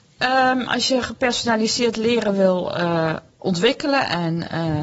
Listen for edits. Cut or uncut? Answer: uncut